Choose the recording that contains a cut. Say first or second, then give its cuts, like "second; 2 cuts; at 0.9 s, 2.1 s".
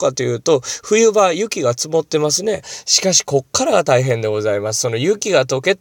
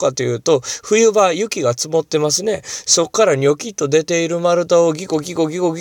first; 1 cut; at 2.6 s